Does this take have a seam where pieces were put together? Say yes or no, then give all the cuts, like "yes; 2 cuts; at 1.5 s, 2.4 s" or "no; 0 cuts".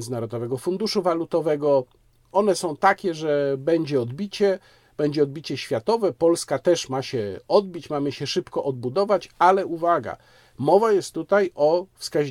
no; 0 cuts